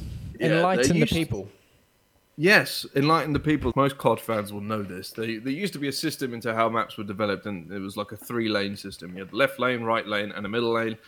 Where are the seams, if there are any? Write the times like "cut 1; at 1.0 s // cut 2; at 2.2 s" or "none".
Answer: cut 1; at 3.7 s